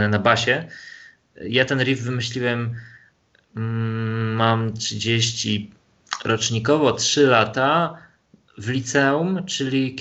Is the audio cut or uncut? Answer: uncut